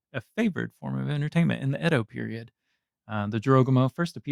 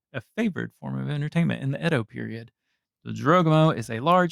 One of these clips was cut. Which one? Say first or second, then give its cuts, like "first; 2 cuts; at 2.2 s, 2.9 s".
second; 1 cut; at 2.8 s